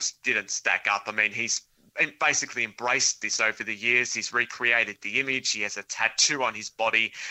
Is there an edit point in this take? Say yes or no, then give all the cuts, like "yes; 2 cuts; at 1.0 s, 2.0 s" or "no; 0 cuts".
no; 0 cuts